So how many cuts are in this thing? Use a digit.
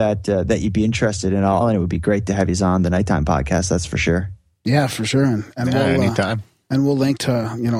1